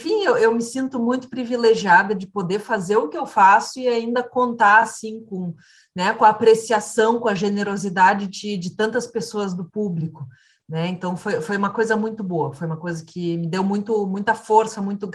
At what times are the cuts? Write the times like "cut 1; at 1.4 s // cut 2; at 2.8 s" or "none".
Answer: none